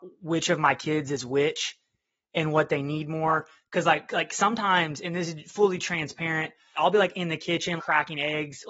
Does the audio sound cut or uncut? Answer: cut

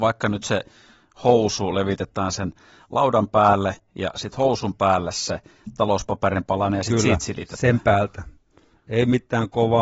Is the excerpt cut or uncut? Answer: uncut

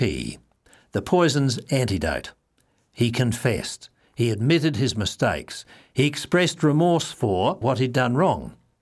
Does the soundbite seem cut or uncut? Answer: cut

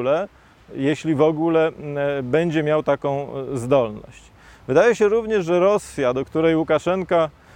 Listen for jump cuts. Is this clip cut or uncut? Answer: uncut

